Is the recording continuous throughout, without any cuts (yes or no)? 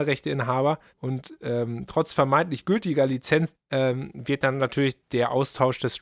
no